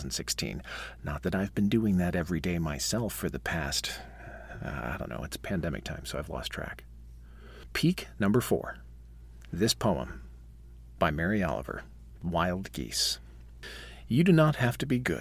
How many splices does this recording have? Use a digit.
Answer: 0